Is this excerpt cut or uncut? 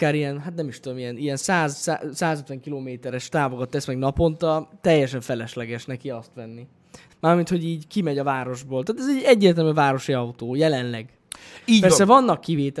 cut